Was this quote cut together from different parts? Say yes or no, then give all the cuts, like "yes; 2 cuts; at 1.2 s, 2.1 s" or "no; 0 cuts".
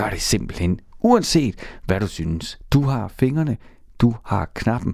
yes; 1 cut; at 2.7 s